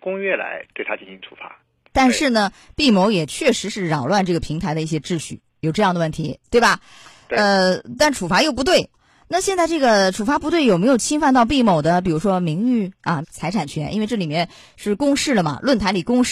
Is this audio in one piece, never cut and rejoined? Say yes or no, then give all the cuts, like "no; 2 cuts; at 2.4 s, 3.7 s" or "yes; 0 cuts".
no; 2 cuts; at 1.9 s, 13.2 s